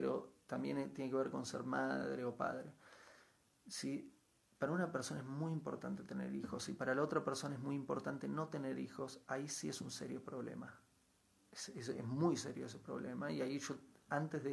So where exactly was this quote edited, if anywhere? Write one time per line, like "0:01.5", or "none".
none